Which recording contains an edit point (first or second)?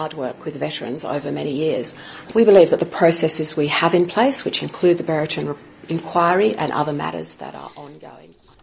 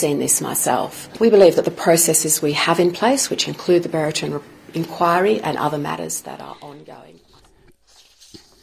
first